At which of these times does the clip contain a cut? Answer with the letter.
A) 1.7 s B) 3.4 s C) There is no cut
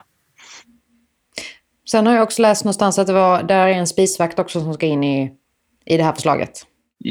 C